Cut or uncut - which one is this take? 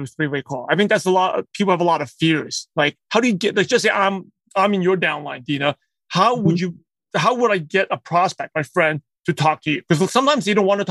uncut